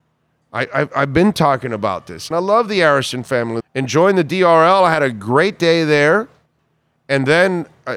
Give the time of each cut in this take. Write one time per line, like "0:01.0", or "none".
0:02.3
0:03.6